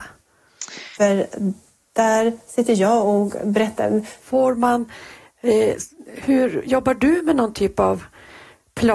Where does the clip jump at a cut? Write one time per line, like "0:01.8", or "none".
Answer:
0:01.0
0:04.2